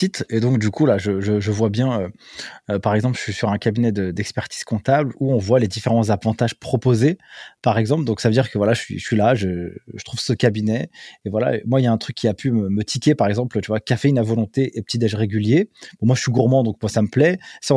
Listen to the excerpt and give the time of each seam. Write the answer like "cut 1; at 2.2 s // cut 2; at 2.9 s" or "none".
none